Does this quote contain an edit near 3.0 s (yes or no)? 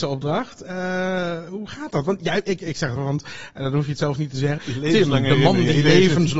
yes